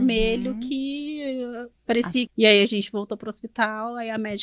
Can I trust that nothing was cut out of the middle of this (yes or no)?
no